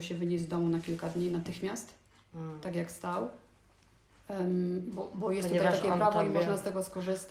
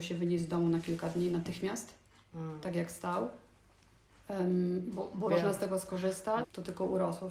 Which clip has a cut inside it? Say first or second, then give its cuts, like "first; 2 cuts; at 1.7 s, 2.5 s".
second; 2 cuts; at 5.3 s, 6.4 s